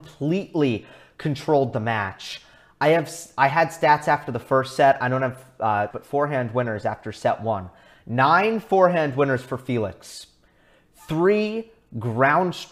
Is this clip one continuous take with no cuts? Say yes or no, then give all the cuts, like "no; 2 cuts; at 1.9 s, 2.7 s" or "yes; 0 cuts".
no; 1 cut; at 5.9 s